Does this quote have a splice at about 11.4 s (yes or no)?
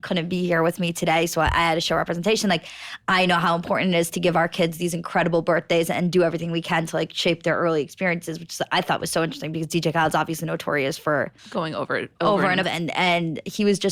yes